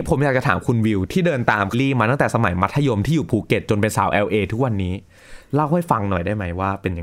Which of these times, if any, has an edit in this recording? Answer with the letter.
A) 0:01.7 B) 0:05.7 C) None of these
A